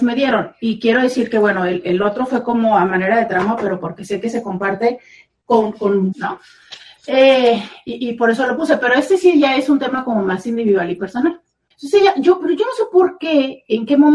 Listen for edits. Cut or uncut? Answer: cut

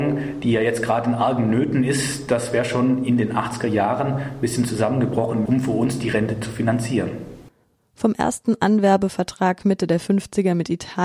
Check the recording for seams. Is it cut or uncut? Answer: cut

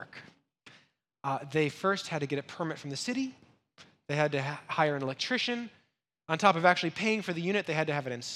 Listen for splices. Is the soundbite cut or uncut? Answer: uncut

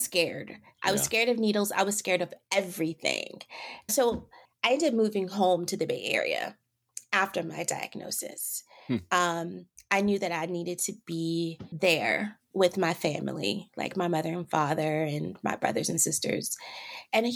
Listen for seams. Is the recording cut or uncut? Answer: cut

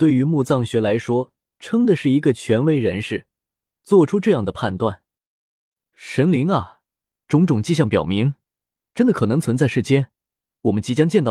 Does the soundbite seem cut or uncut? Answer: uncut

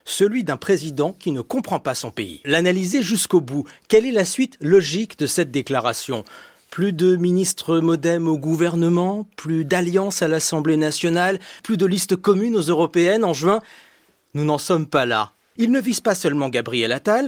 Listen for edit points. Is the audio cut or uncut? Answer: cut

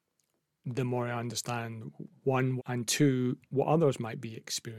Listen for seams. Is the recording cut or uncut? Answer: cut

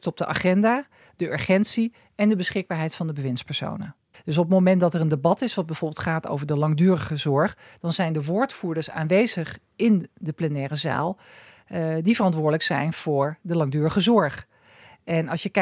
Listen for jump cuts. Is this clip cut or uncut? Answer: cut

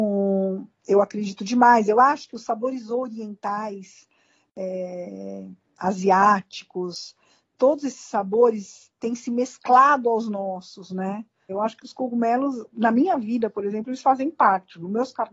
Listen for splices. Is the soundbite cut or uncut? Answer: cut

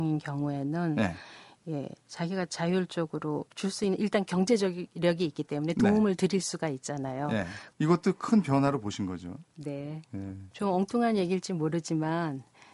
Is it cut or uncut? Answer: cut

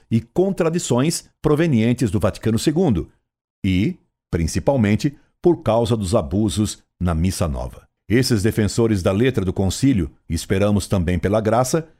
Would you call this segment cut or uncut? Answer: cut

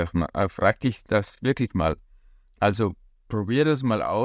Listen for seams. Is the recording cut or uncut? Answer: uncut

